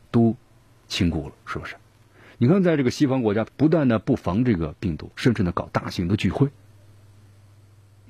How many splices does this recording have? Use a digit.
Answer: 2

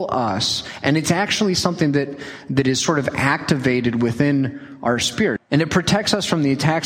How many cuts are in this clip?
1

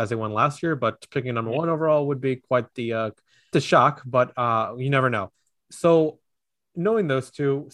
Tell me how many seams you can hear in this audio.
1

